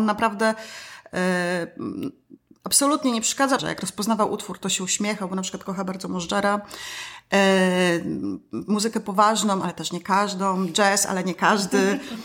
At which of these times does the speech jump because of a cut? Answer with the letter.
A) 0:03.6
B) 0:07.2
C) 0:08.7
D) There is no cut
A